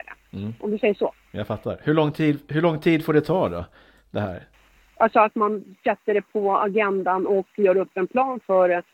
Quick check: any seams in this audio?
no; 0 cuts

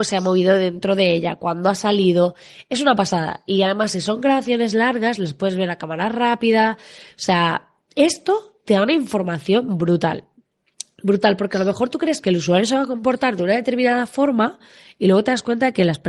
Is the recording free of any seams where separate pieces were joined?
yes; 0 cuts

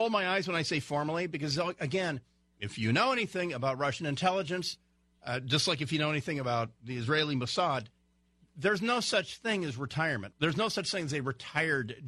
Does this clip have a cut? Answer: yes; 1 cut; at 10.3 s

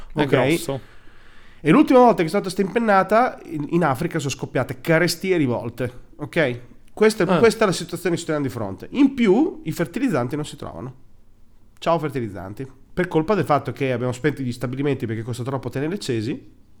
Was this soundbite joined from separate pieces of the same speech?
no; 0 cuts

